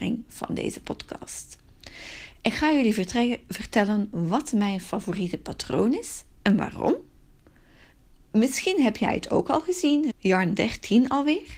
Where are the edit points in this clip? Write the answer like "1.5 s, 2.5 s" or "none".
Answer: 10.1 s